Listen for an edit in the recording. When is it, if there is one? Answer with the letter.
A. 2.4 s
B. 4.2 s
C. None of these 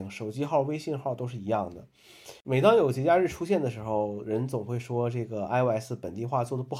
A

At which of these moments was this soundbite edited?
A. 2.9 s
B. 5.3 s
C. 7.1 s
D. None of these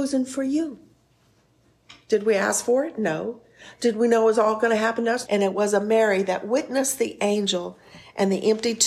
B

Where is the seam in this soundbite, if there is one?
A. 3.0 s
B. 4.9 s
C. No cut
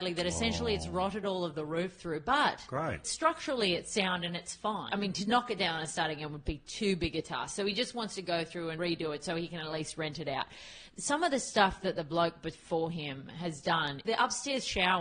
A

